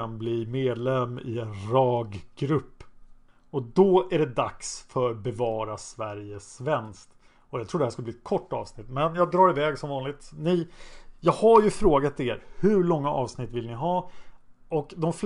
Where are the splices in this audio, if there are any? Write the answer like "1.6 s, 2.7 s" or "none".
none